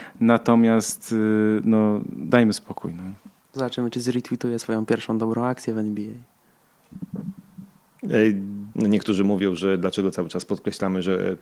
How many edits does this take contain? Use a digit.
1